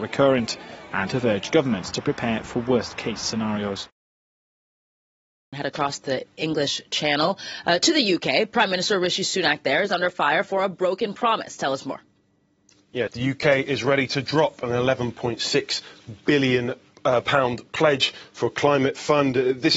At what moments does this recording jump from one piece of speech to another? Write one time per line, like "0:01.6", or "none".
0:13.1